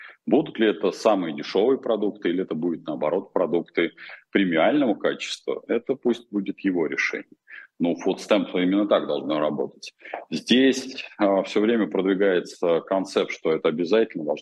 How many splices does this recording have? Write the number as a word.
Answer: zero